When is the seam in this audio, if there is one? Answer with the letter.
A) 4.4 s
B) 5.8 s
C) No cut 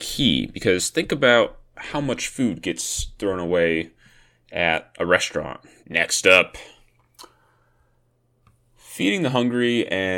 B